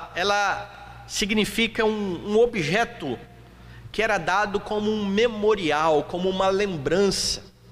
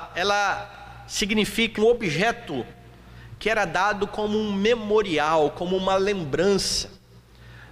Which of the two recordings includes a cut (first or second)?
second